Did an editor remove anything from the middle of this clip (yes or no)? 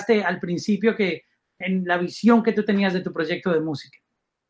yes